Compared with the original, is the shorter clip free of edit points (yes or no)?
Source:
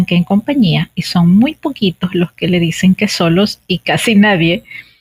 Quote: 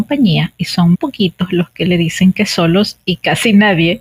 no